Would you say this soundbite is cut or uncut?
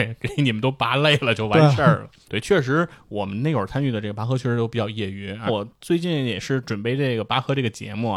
cut